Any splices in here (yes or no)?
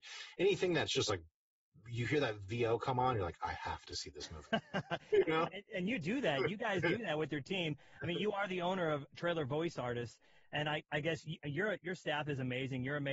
no